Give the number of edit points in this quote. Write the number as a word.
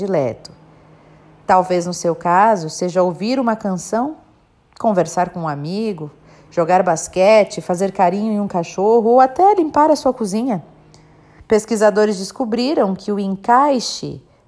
one